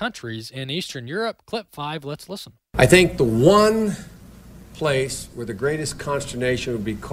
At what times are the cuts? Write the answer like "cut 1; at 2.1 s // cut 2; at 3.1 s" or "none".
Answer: cut 1; at 2.6 s